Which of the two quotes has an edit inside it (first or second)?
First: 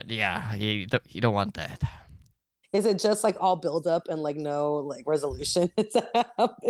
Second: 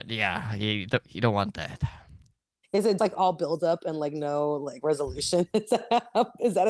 second